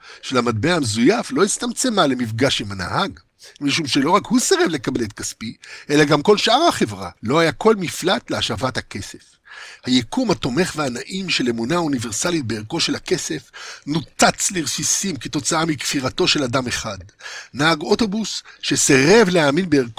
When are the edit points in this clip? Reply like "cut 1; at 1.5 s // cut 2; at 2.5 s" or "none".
cut 1; at 7.2 s // cut 2; at 9.8 s